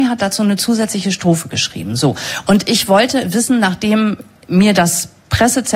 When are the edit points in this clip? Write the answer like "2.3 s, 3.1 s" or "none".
none